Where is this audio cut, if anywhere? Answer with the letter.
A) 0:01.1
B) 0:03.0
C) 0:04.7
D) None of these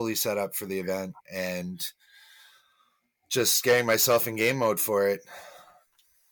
D